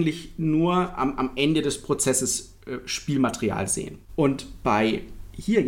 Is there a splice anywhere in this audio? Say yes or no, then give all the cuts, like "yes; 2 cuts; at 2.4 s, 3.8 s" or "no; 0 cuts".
yes; 1 cut; at 4.0 s